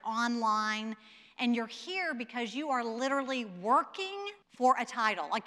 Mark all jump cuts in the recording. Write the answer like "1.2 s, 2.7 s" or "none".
4.4 s